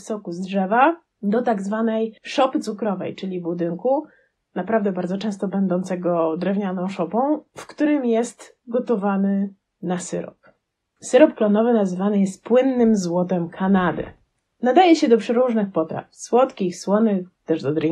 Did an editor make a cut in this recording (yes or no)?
yes